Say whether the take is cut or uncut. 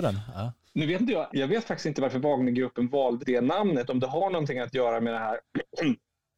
cut